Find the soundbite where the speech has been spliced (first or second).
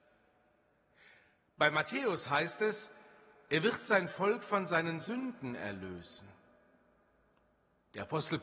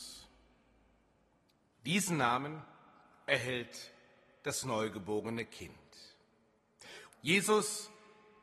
second